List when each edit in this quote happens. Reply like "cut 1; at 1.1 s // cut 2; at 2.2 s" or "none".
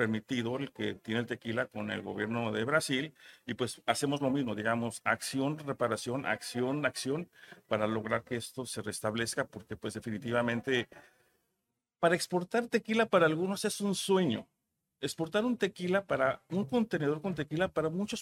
none